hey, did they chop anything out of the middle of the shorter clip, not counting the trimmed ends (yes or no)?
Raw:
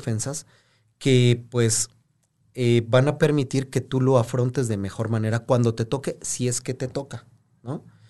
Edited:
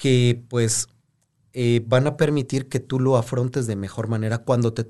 no